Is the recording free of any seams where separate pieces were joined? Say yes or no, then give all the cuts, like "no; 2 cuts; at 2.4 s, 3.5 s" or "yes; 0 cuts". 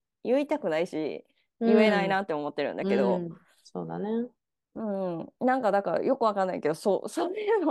yes; 0 cuts